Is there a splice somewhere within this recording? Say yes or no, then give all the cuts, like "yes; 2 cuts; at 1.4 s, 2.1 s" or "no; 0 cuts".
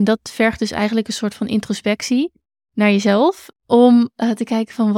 yes; 1 cut; at 3.5 s